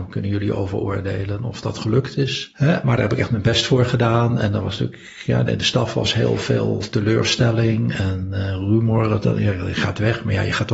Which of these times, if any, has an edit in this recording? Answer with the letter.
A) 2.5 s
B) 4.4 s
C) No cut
C